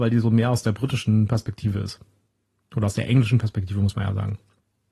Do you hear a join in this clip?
no; 0 cuts

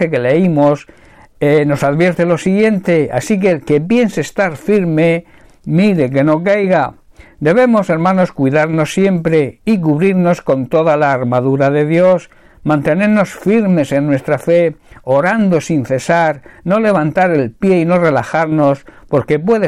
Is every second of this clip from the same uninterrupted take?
yes; 0 cuts

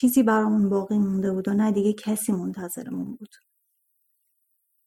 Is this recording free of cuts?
yes; 0 cuts

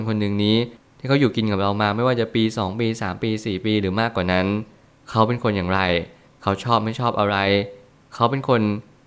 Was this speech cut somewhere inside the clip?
no; 0 cuts

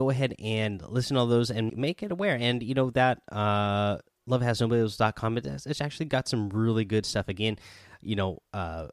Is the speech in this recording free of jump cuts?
no; 1 cut; at 1.7 s

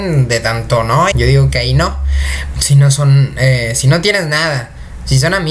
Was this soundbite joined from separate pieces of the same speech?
yes; 2 cuts; at 1.1 s, 2.5 s

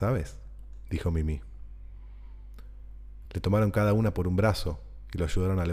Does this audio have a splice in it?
no; 0 cuts

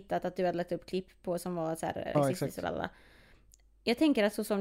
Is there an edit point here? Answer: yes; 1 cut; at 2.1 s

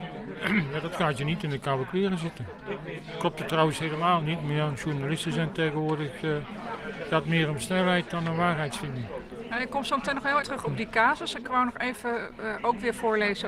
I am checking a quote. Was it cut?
yes; 2 cuts; at 10.4 s, 12.6 s

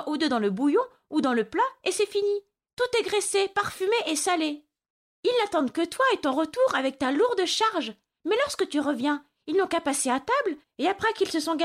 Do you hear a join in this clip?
no; 0 cuts

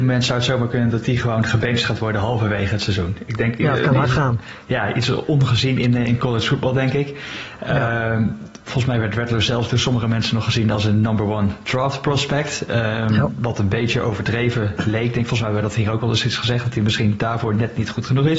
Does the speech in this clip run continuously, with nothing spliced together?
yes; 0 cuts

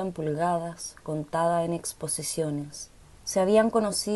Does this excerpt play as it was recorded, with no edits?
no; 1 cut; at 3.0 s

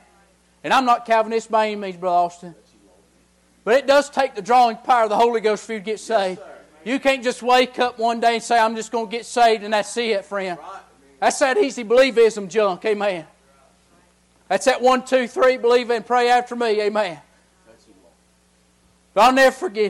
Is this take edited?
no; 0 cuts

